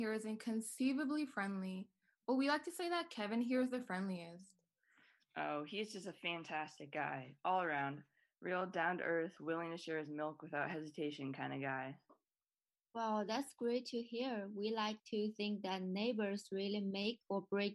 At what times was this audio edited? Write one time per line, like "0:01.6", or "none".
none